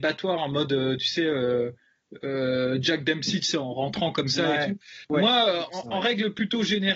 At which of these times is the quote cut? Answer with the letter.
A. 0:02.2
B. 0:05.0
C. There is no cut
B